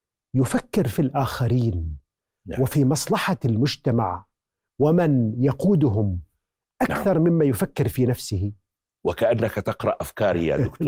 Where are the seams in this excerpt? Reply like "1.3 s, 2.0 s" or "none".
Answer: none